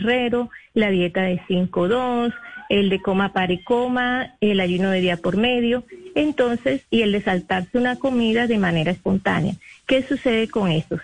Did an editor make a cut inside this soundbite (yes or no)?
no